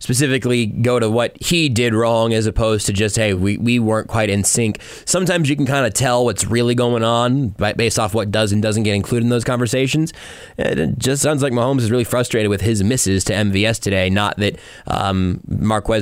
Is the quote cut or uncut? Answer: uncut